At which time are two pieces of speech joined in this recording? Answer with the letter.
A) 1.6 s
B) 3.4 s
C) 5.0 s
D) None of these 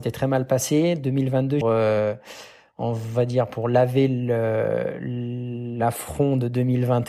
A